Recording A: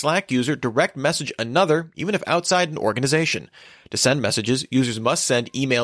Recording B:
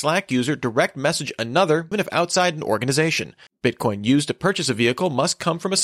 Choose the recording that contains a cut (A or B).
B